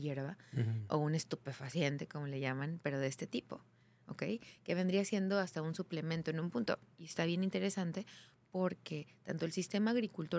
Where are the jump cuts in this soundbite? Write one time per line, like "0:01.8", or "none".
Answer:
none